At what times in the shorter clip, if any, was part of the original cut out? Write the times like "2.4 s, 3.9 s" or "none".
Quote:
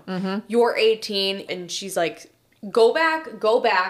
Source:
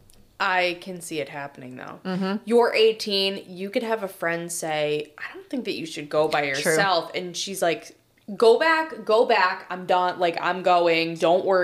1.5 s